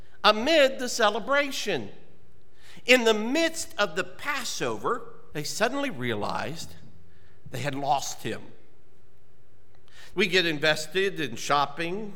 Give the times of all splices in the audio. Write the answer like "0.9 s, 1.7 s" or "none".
5.3 s, 10.1 s